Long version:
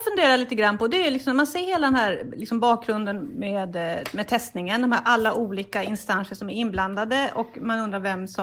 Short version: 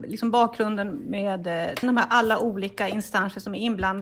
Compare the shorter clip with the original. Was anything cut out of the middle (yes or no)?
yes